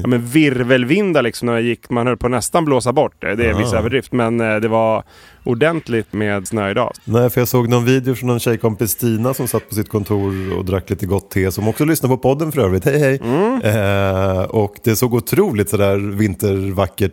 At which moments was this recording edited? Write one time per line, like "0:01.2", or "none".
none